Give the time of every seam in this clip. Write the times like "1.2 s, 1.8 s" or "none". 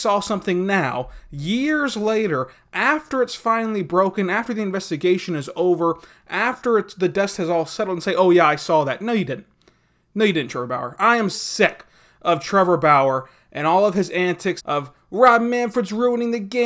11.3 s, 14.6 s